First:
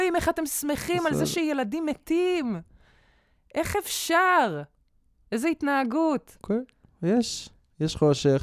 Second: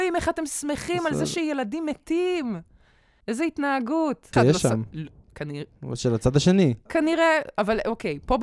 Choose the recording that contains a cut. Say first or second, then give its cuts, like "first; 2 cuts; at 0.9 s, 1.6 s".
second; 3 cuts; at 3.2 s, 4.3 s, 6.9 s